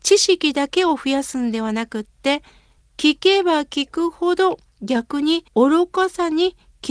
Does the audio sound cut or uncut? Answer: cut